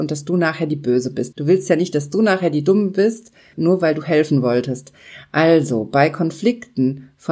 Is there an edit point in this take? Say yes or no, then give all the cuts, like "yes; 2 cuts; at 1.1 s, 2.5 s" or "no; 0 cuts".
yes; 2 cuts; at 1.3 s, 3.5 s